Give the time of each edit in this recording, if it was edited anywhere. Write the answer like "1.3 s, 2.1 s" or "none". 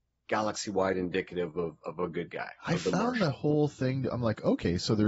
none